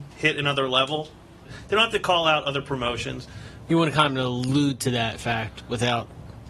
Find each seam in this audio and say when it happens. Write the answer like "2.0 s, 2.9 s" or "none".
1.4 s, 3.7 s